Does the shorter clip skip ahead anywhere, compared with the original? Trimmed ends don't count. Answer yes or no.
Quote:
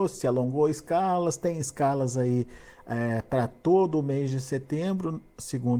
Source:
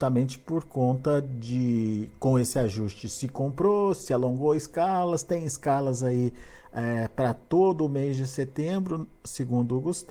no